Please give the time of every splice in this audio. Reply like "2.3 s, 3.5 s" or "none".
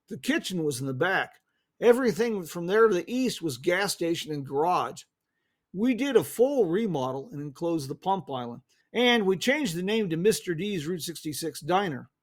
8.8 s